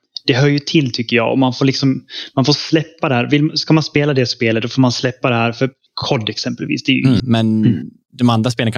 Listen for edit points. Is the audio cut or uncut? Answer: cut